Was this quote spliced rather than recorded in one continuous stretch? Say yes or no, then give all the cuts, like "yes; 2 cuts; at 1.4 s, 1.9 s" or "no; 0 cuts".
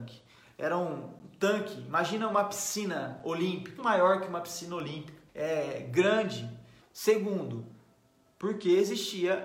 yes; 3 cuts; at 3.8 s, 5.3 s, 6.8 s